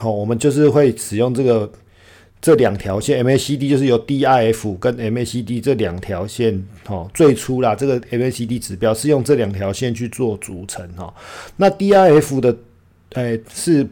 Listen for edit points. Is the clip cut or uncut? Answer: uncut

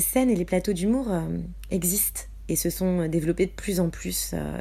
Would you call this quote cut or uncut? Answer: uncut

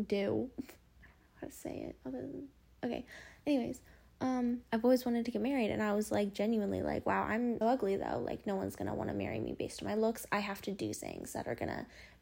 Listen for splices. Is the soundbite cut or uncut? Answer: cut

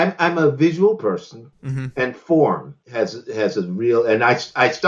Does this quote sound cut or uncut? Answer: cut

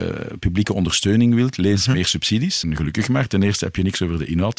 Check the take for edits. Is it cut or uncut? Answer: cut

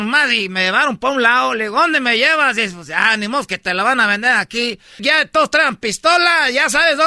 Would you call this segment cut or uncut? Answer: cut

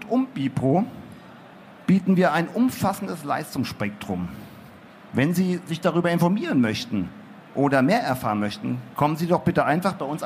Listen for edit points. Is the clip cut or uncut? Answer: uncut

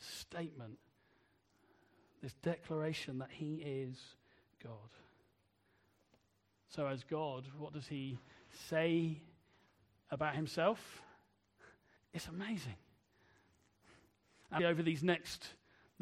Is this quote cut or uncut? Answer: cut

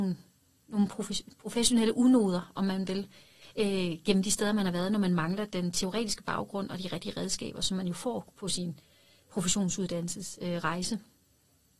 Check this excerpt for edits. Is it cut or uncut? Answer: uncut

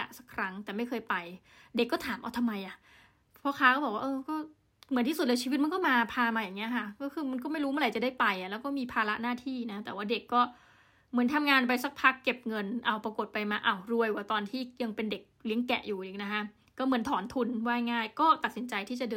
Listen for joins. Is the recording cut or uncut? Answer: uncut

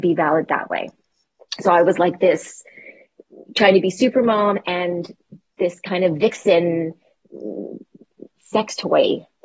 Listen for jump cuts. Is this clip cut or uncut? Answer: uncut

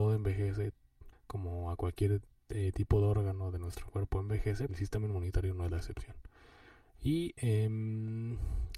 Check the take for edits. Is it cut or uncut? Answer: cut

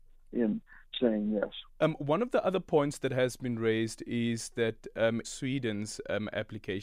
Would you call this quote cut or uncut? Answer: cut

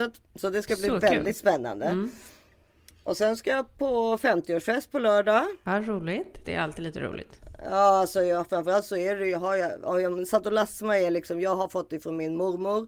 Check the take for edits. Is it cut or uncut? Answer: cut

